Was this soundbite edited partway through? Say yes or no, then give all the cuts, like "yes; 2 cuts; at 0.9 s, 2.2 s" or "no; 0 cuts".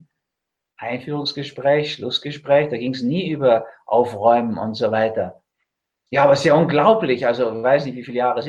no; 0 cuts